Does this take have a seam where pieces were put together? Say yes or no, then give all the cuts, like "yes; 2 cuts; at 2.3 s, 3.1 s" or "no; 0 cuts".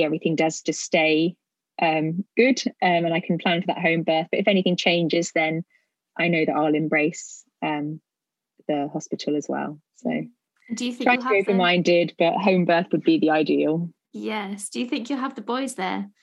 yes; 1 cut; at 2.3 s